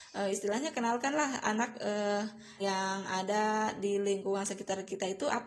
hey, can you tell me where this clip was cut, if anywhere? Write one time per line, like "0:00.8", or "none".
0:02.6